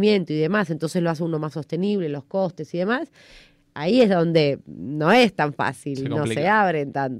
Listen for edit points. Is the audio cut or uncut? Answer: uncut